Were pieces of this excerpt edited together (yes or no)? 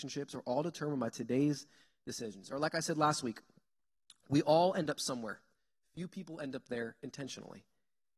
no